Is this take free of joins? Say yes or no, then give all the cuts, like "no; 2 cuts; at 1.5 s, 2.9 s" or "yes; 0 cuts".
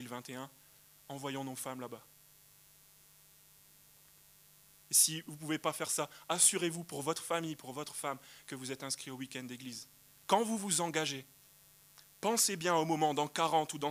no; 1 cut; at 10.2 s